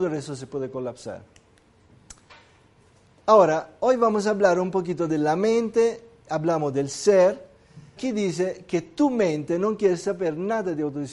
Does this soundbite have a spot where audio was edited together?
yes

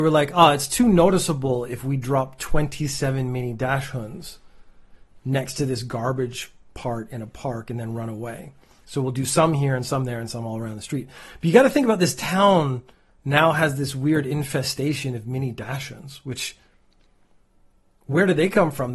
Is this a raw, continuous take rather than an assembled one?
yes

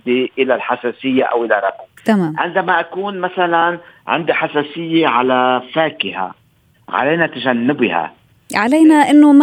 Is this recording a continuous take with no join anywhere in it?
no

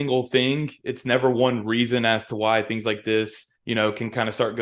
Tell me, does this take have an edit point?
yes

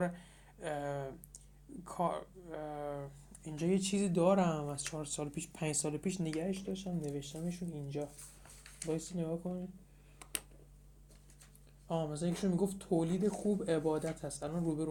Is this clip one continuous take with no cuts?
yes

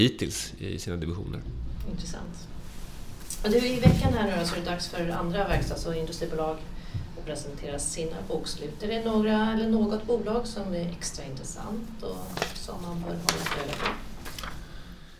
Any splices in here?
no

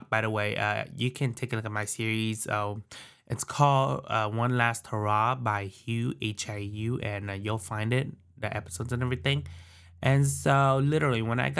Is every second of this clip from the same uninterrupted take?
yes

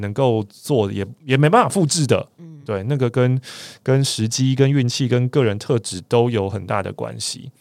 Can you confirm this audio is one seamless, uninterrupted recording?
yes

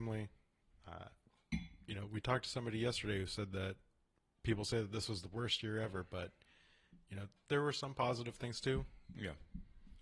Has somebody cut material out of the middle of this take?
no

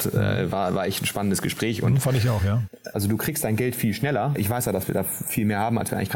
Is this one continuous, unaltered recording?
no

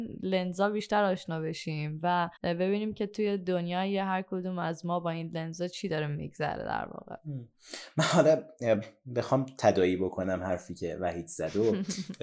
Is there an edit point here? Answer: yes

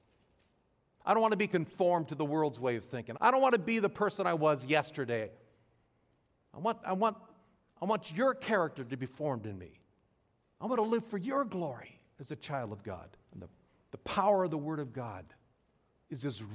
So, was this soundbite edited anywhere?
yes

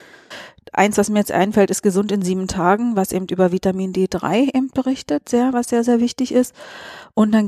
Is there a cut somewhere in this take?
no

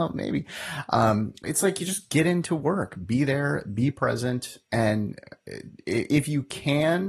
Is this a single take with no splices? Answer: no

